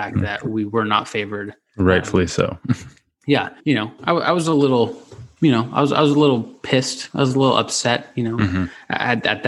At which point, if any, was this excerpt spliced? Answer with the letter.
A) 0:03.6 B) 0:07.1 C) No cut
A